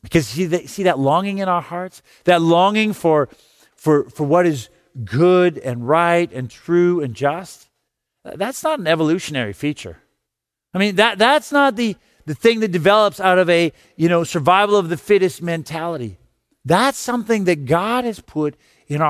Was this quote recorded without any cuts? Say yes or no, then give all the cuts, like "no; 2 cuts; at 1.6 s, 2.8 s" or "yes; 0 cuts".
yes; 0 cuts